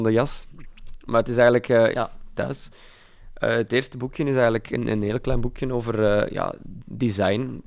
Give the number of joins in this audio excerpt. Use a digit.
1